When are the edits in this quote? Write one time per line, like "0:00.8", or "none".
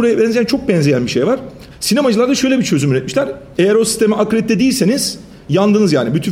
0:01.7
0:03.5